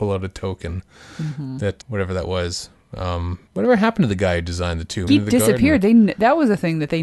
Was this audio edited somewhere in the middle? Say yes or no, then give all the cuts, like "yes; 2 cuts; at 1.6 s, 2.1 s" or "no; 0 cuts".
yes; 3 cuts; at 1.8 s, 3.5 s, 5.1 s